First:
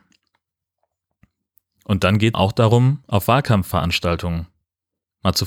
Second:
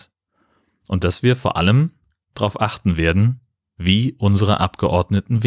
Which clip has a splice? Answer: first; 1 cut; at 2.3 s

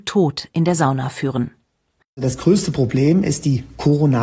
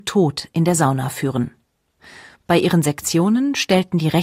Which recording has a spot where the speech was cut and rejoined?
first; 1 cut; at 2.0 s

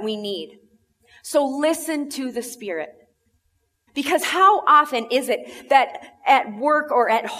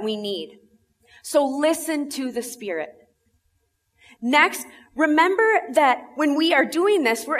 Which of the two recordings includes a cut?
first; 1 cut; at 3.9 s

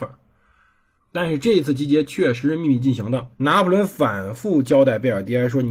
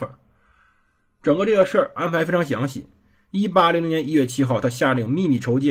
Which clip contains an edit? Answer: first; 2 cuts; at 1.0 s, 3.3 s

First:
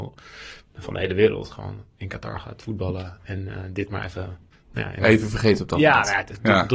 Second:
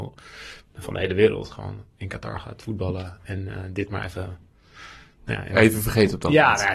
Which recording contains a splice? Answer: first; 1 cut; at 4.5 s

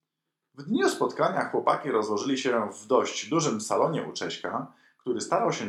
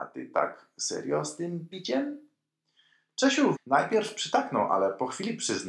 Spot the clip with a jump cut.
second; 1 cut; at 3.5 s

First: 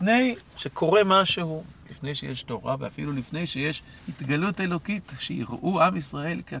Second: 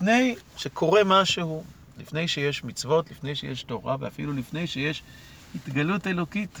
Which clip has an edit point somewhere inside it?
first; 2 cuts; at 1.8 s, 4.0 s

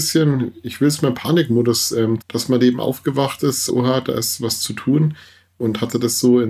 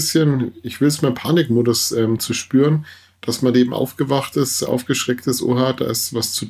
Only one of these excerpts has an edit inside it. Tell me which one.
first; 2 cuts; at 2.2 s, 3.7 s

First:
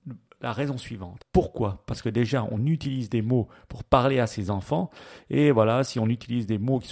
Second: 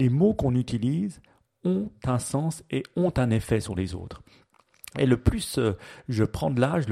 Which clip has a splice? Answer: first; 1 cut; at 1.2 s

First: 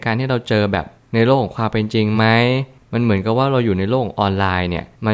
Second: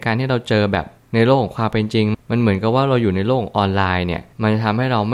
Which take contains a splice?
second; 1 cut; at 2.1 s

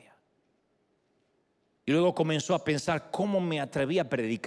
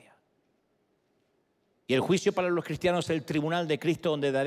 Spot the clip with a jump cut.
second; 1 cut; at 1.7 s

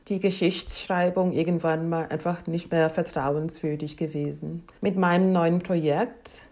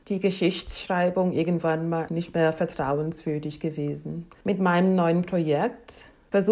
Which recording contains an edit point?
second; 1 cut; at 2.1 s

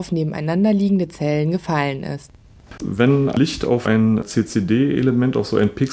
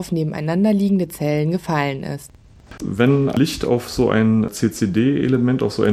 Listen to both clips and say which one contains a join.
first; 1 cut; at 3.8 s

